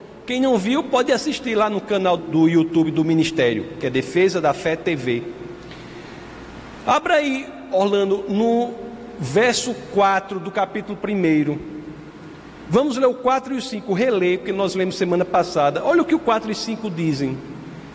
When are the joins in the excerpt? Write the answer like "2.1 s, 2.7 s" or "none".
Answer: 2.2 s